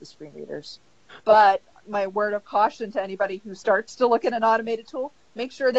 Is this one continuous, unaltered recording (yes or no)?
no